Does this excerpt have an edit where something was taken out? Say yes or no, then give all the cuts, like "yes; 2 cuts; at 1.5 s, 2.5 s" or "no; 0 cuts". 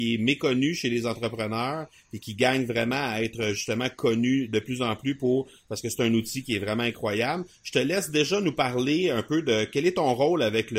no; 0 cuts